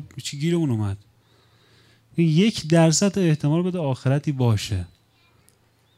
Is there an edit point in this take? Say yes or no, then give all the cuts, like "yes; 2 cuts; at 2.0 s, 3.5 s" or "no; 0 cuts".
no; 0 cuts